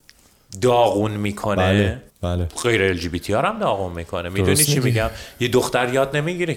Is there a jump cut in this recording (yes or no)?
yes